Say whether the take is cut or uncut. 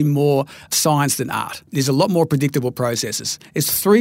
cut